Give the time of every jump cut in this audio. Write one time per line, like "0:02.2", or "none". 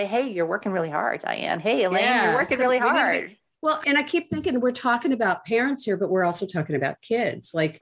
none